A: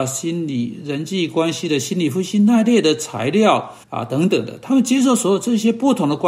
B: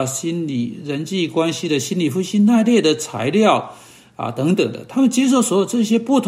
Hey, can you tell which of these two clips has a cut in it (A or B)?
A